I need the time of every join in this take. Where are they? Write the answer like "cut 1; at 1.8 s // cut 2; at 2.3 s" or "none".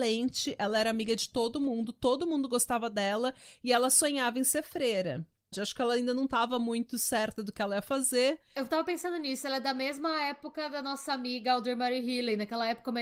cut 1; at 5.5 s // cut 2; at 8.6 s